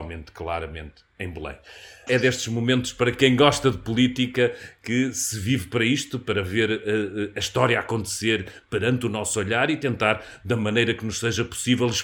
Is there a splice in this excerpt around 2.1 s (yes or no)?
yes